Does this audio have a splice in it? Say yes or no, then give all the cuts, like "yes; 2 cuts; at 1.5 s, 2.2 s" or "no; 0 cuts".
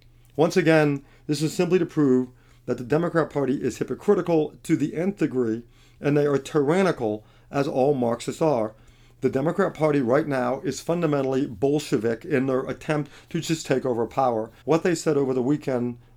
yes; 1 cut; at 14.6 s